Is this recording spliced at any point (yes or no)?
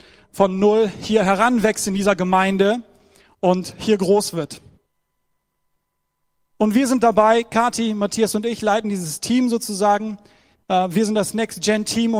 no